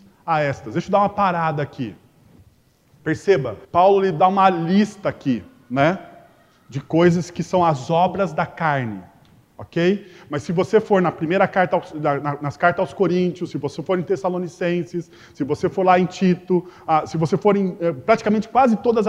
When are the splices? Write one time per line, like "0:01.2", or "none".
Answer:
0:03.6